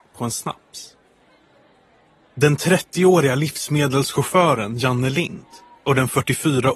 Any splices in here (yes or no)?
no